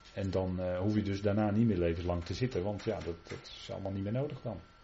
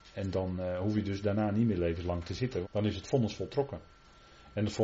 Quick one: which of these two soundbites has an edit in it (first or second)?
second